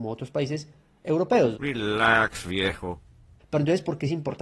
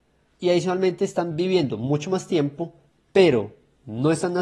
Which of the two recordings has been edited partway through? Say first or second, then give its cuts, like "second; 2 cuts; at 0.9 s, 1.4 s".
first; 1 cut; at 1.5 s